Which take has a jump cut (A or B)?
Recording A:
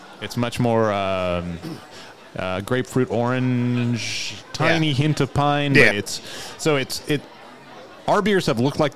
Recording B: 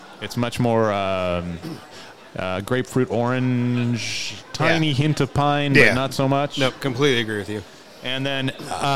A